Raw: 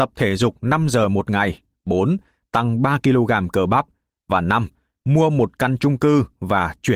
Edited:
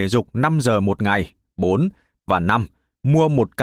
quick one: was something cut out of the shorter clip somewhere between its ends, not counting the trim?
yes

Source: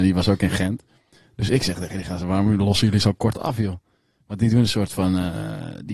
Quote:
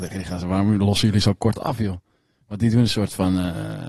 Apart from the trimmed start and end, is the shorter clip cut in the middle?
no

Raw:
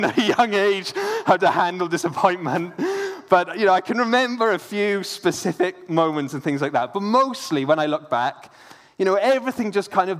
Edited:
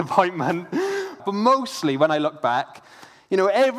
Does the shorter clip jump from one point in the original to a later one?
yes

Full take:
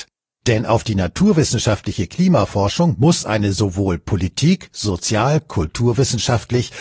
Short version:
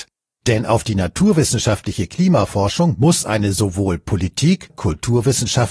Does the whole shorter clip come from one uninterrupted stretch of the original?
no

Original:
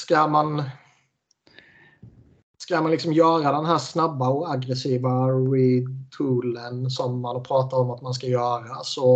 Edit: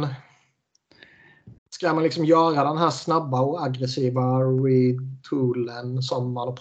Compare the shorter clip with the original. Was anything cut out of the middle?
yes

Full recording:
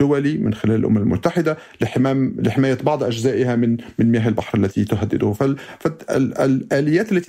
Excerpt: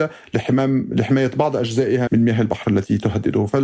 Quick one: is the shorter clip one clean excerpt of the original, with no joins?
no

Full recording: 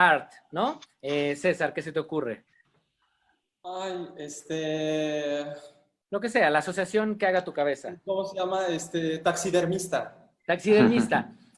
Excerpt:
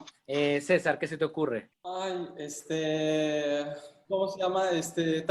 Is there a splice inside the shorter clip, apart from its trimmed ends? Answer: yes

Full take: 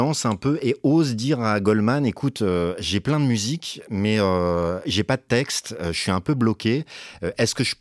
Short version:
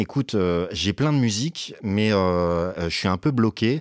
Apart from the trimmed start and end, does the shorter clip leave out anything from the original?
yes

